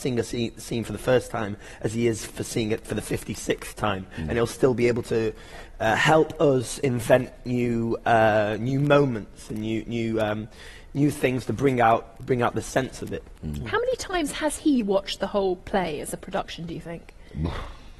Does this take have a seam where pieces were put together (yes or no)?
no